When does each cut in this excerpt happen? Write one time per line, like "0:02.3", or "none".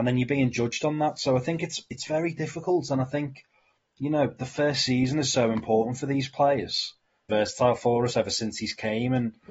0:07.3